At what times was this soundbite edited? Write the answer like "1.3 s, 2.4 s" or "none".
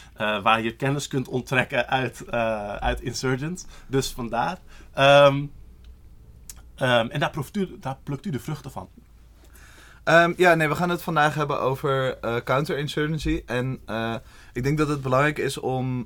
none